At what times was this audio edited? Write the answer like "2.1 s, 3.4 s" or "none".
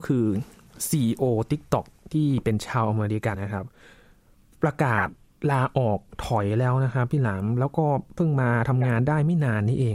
3.3 s

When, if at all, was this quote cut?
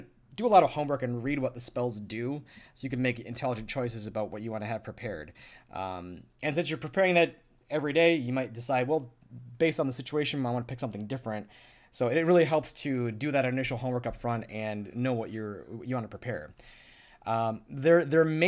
none

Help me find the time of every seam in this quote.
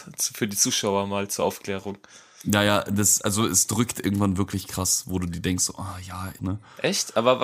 6.4 s

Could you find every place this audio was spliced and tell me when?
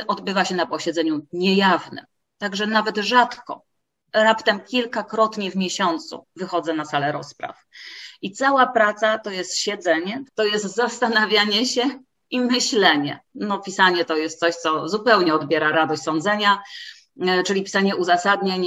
10.3 s, 13.3 s

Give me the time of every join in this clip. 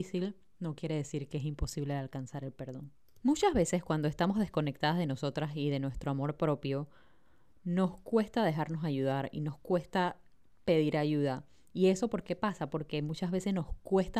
none

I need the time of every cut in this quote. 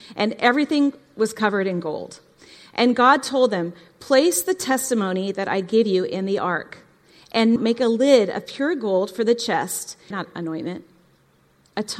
7.6 s, 10.1 s

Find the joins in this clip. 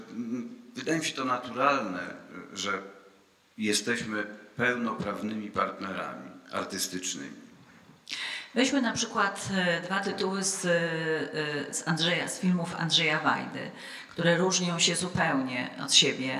11.7 s

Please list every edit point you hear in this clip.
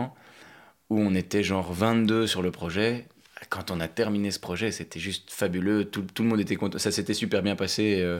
none

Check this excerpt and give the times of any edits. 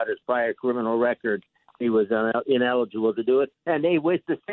none

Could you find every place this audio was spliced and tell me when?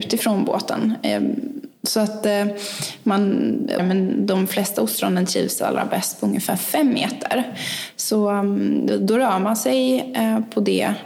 3.8 s

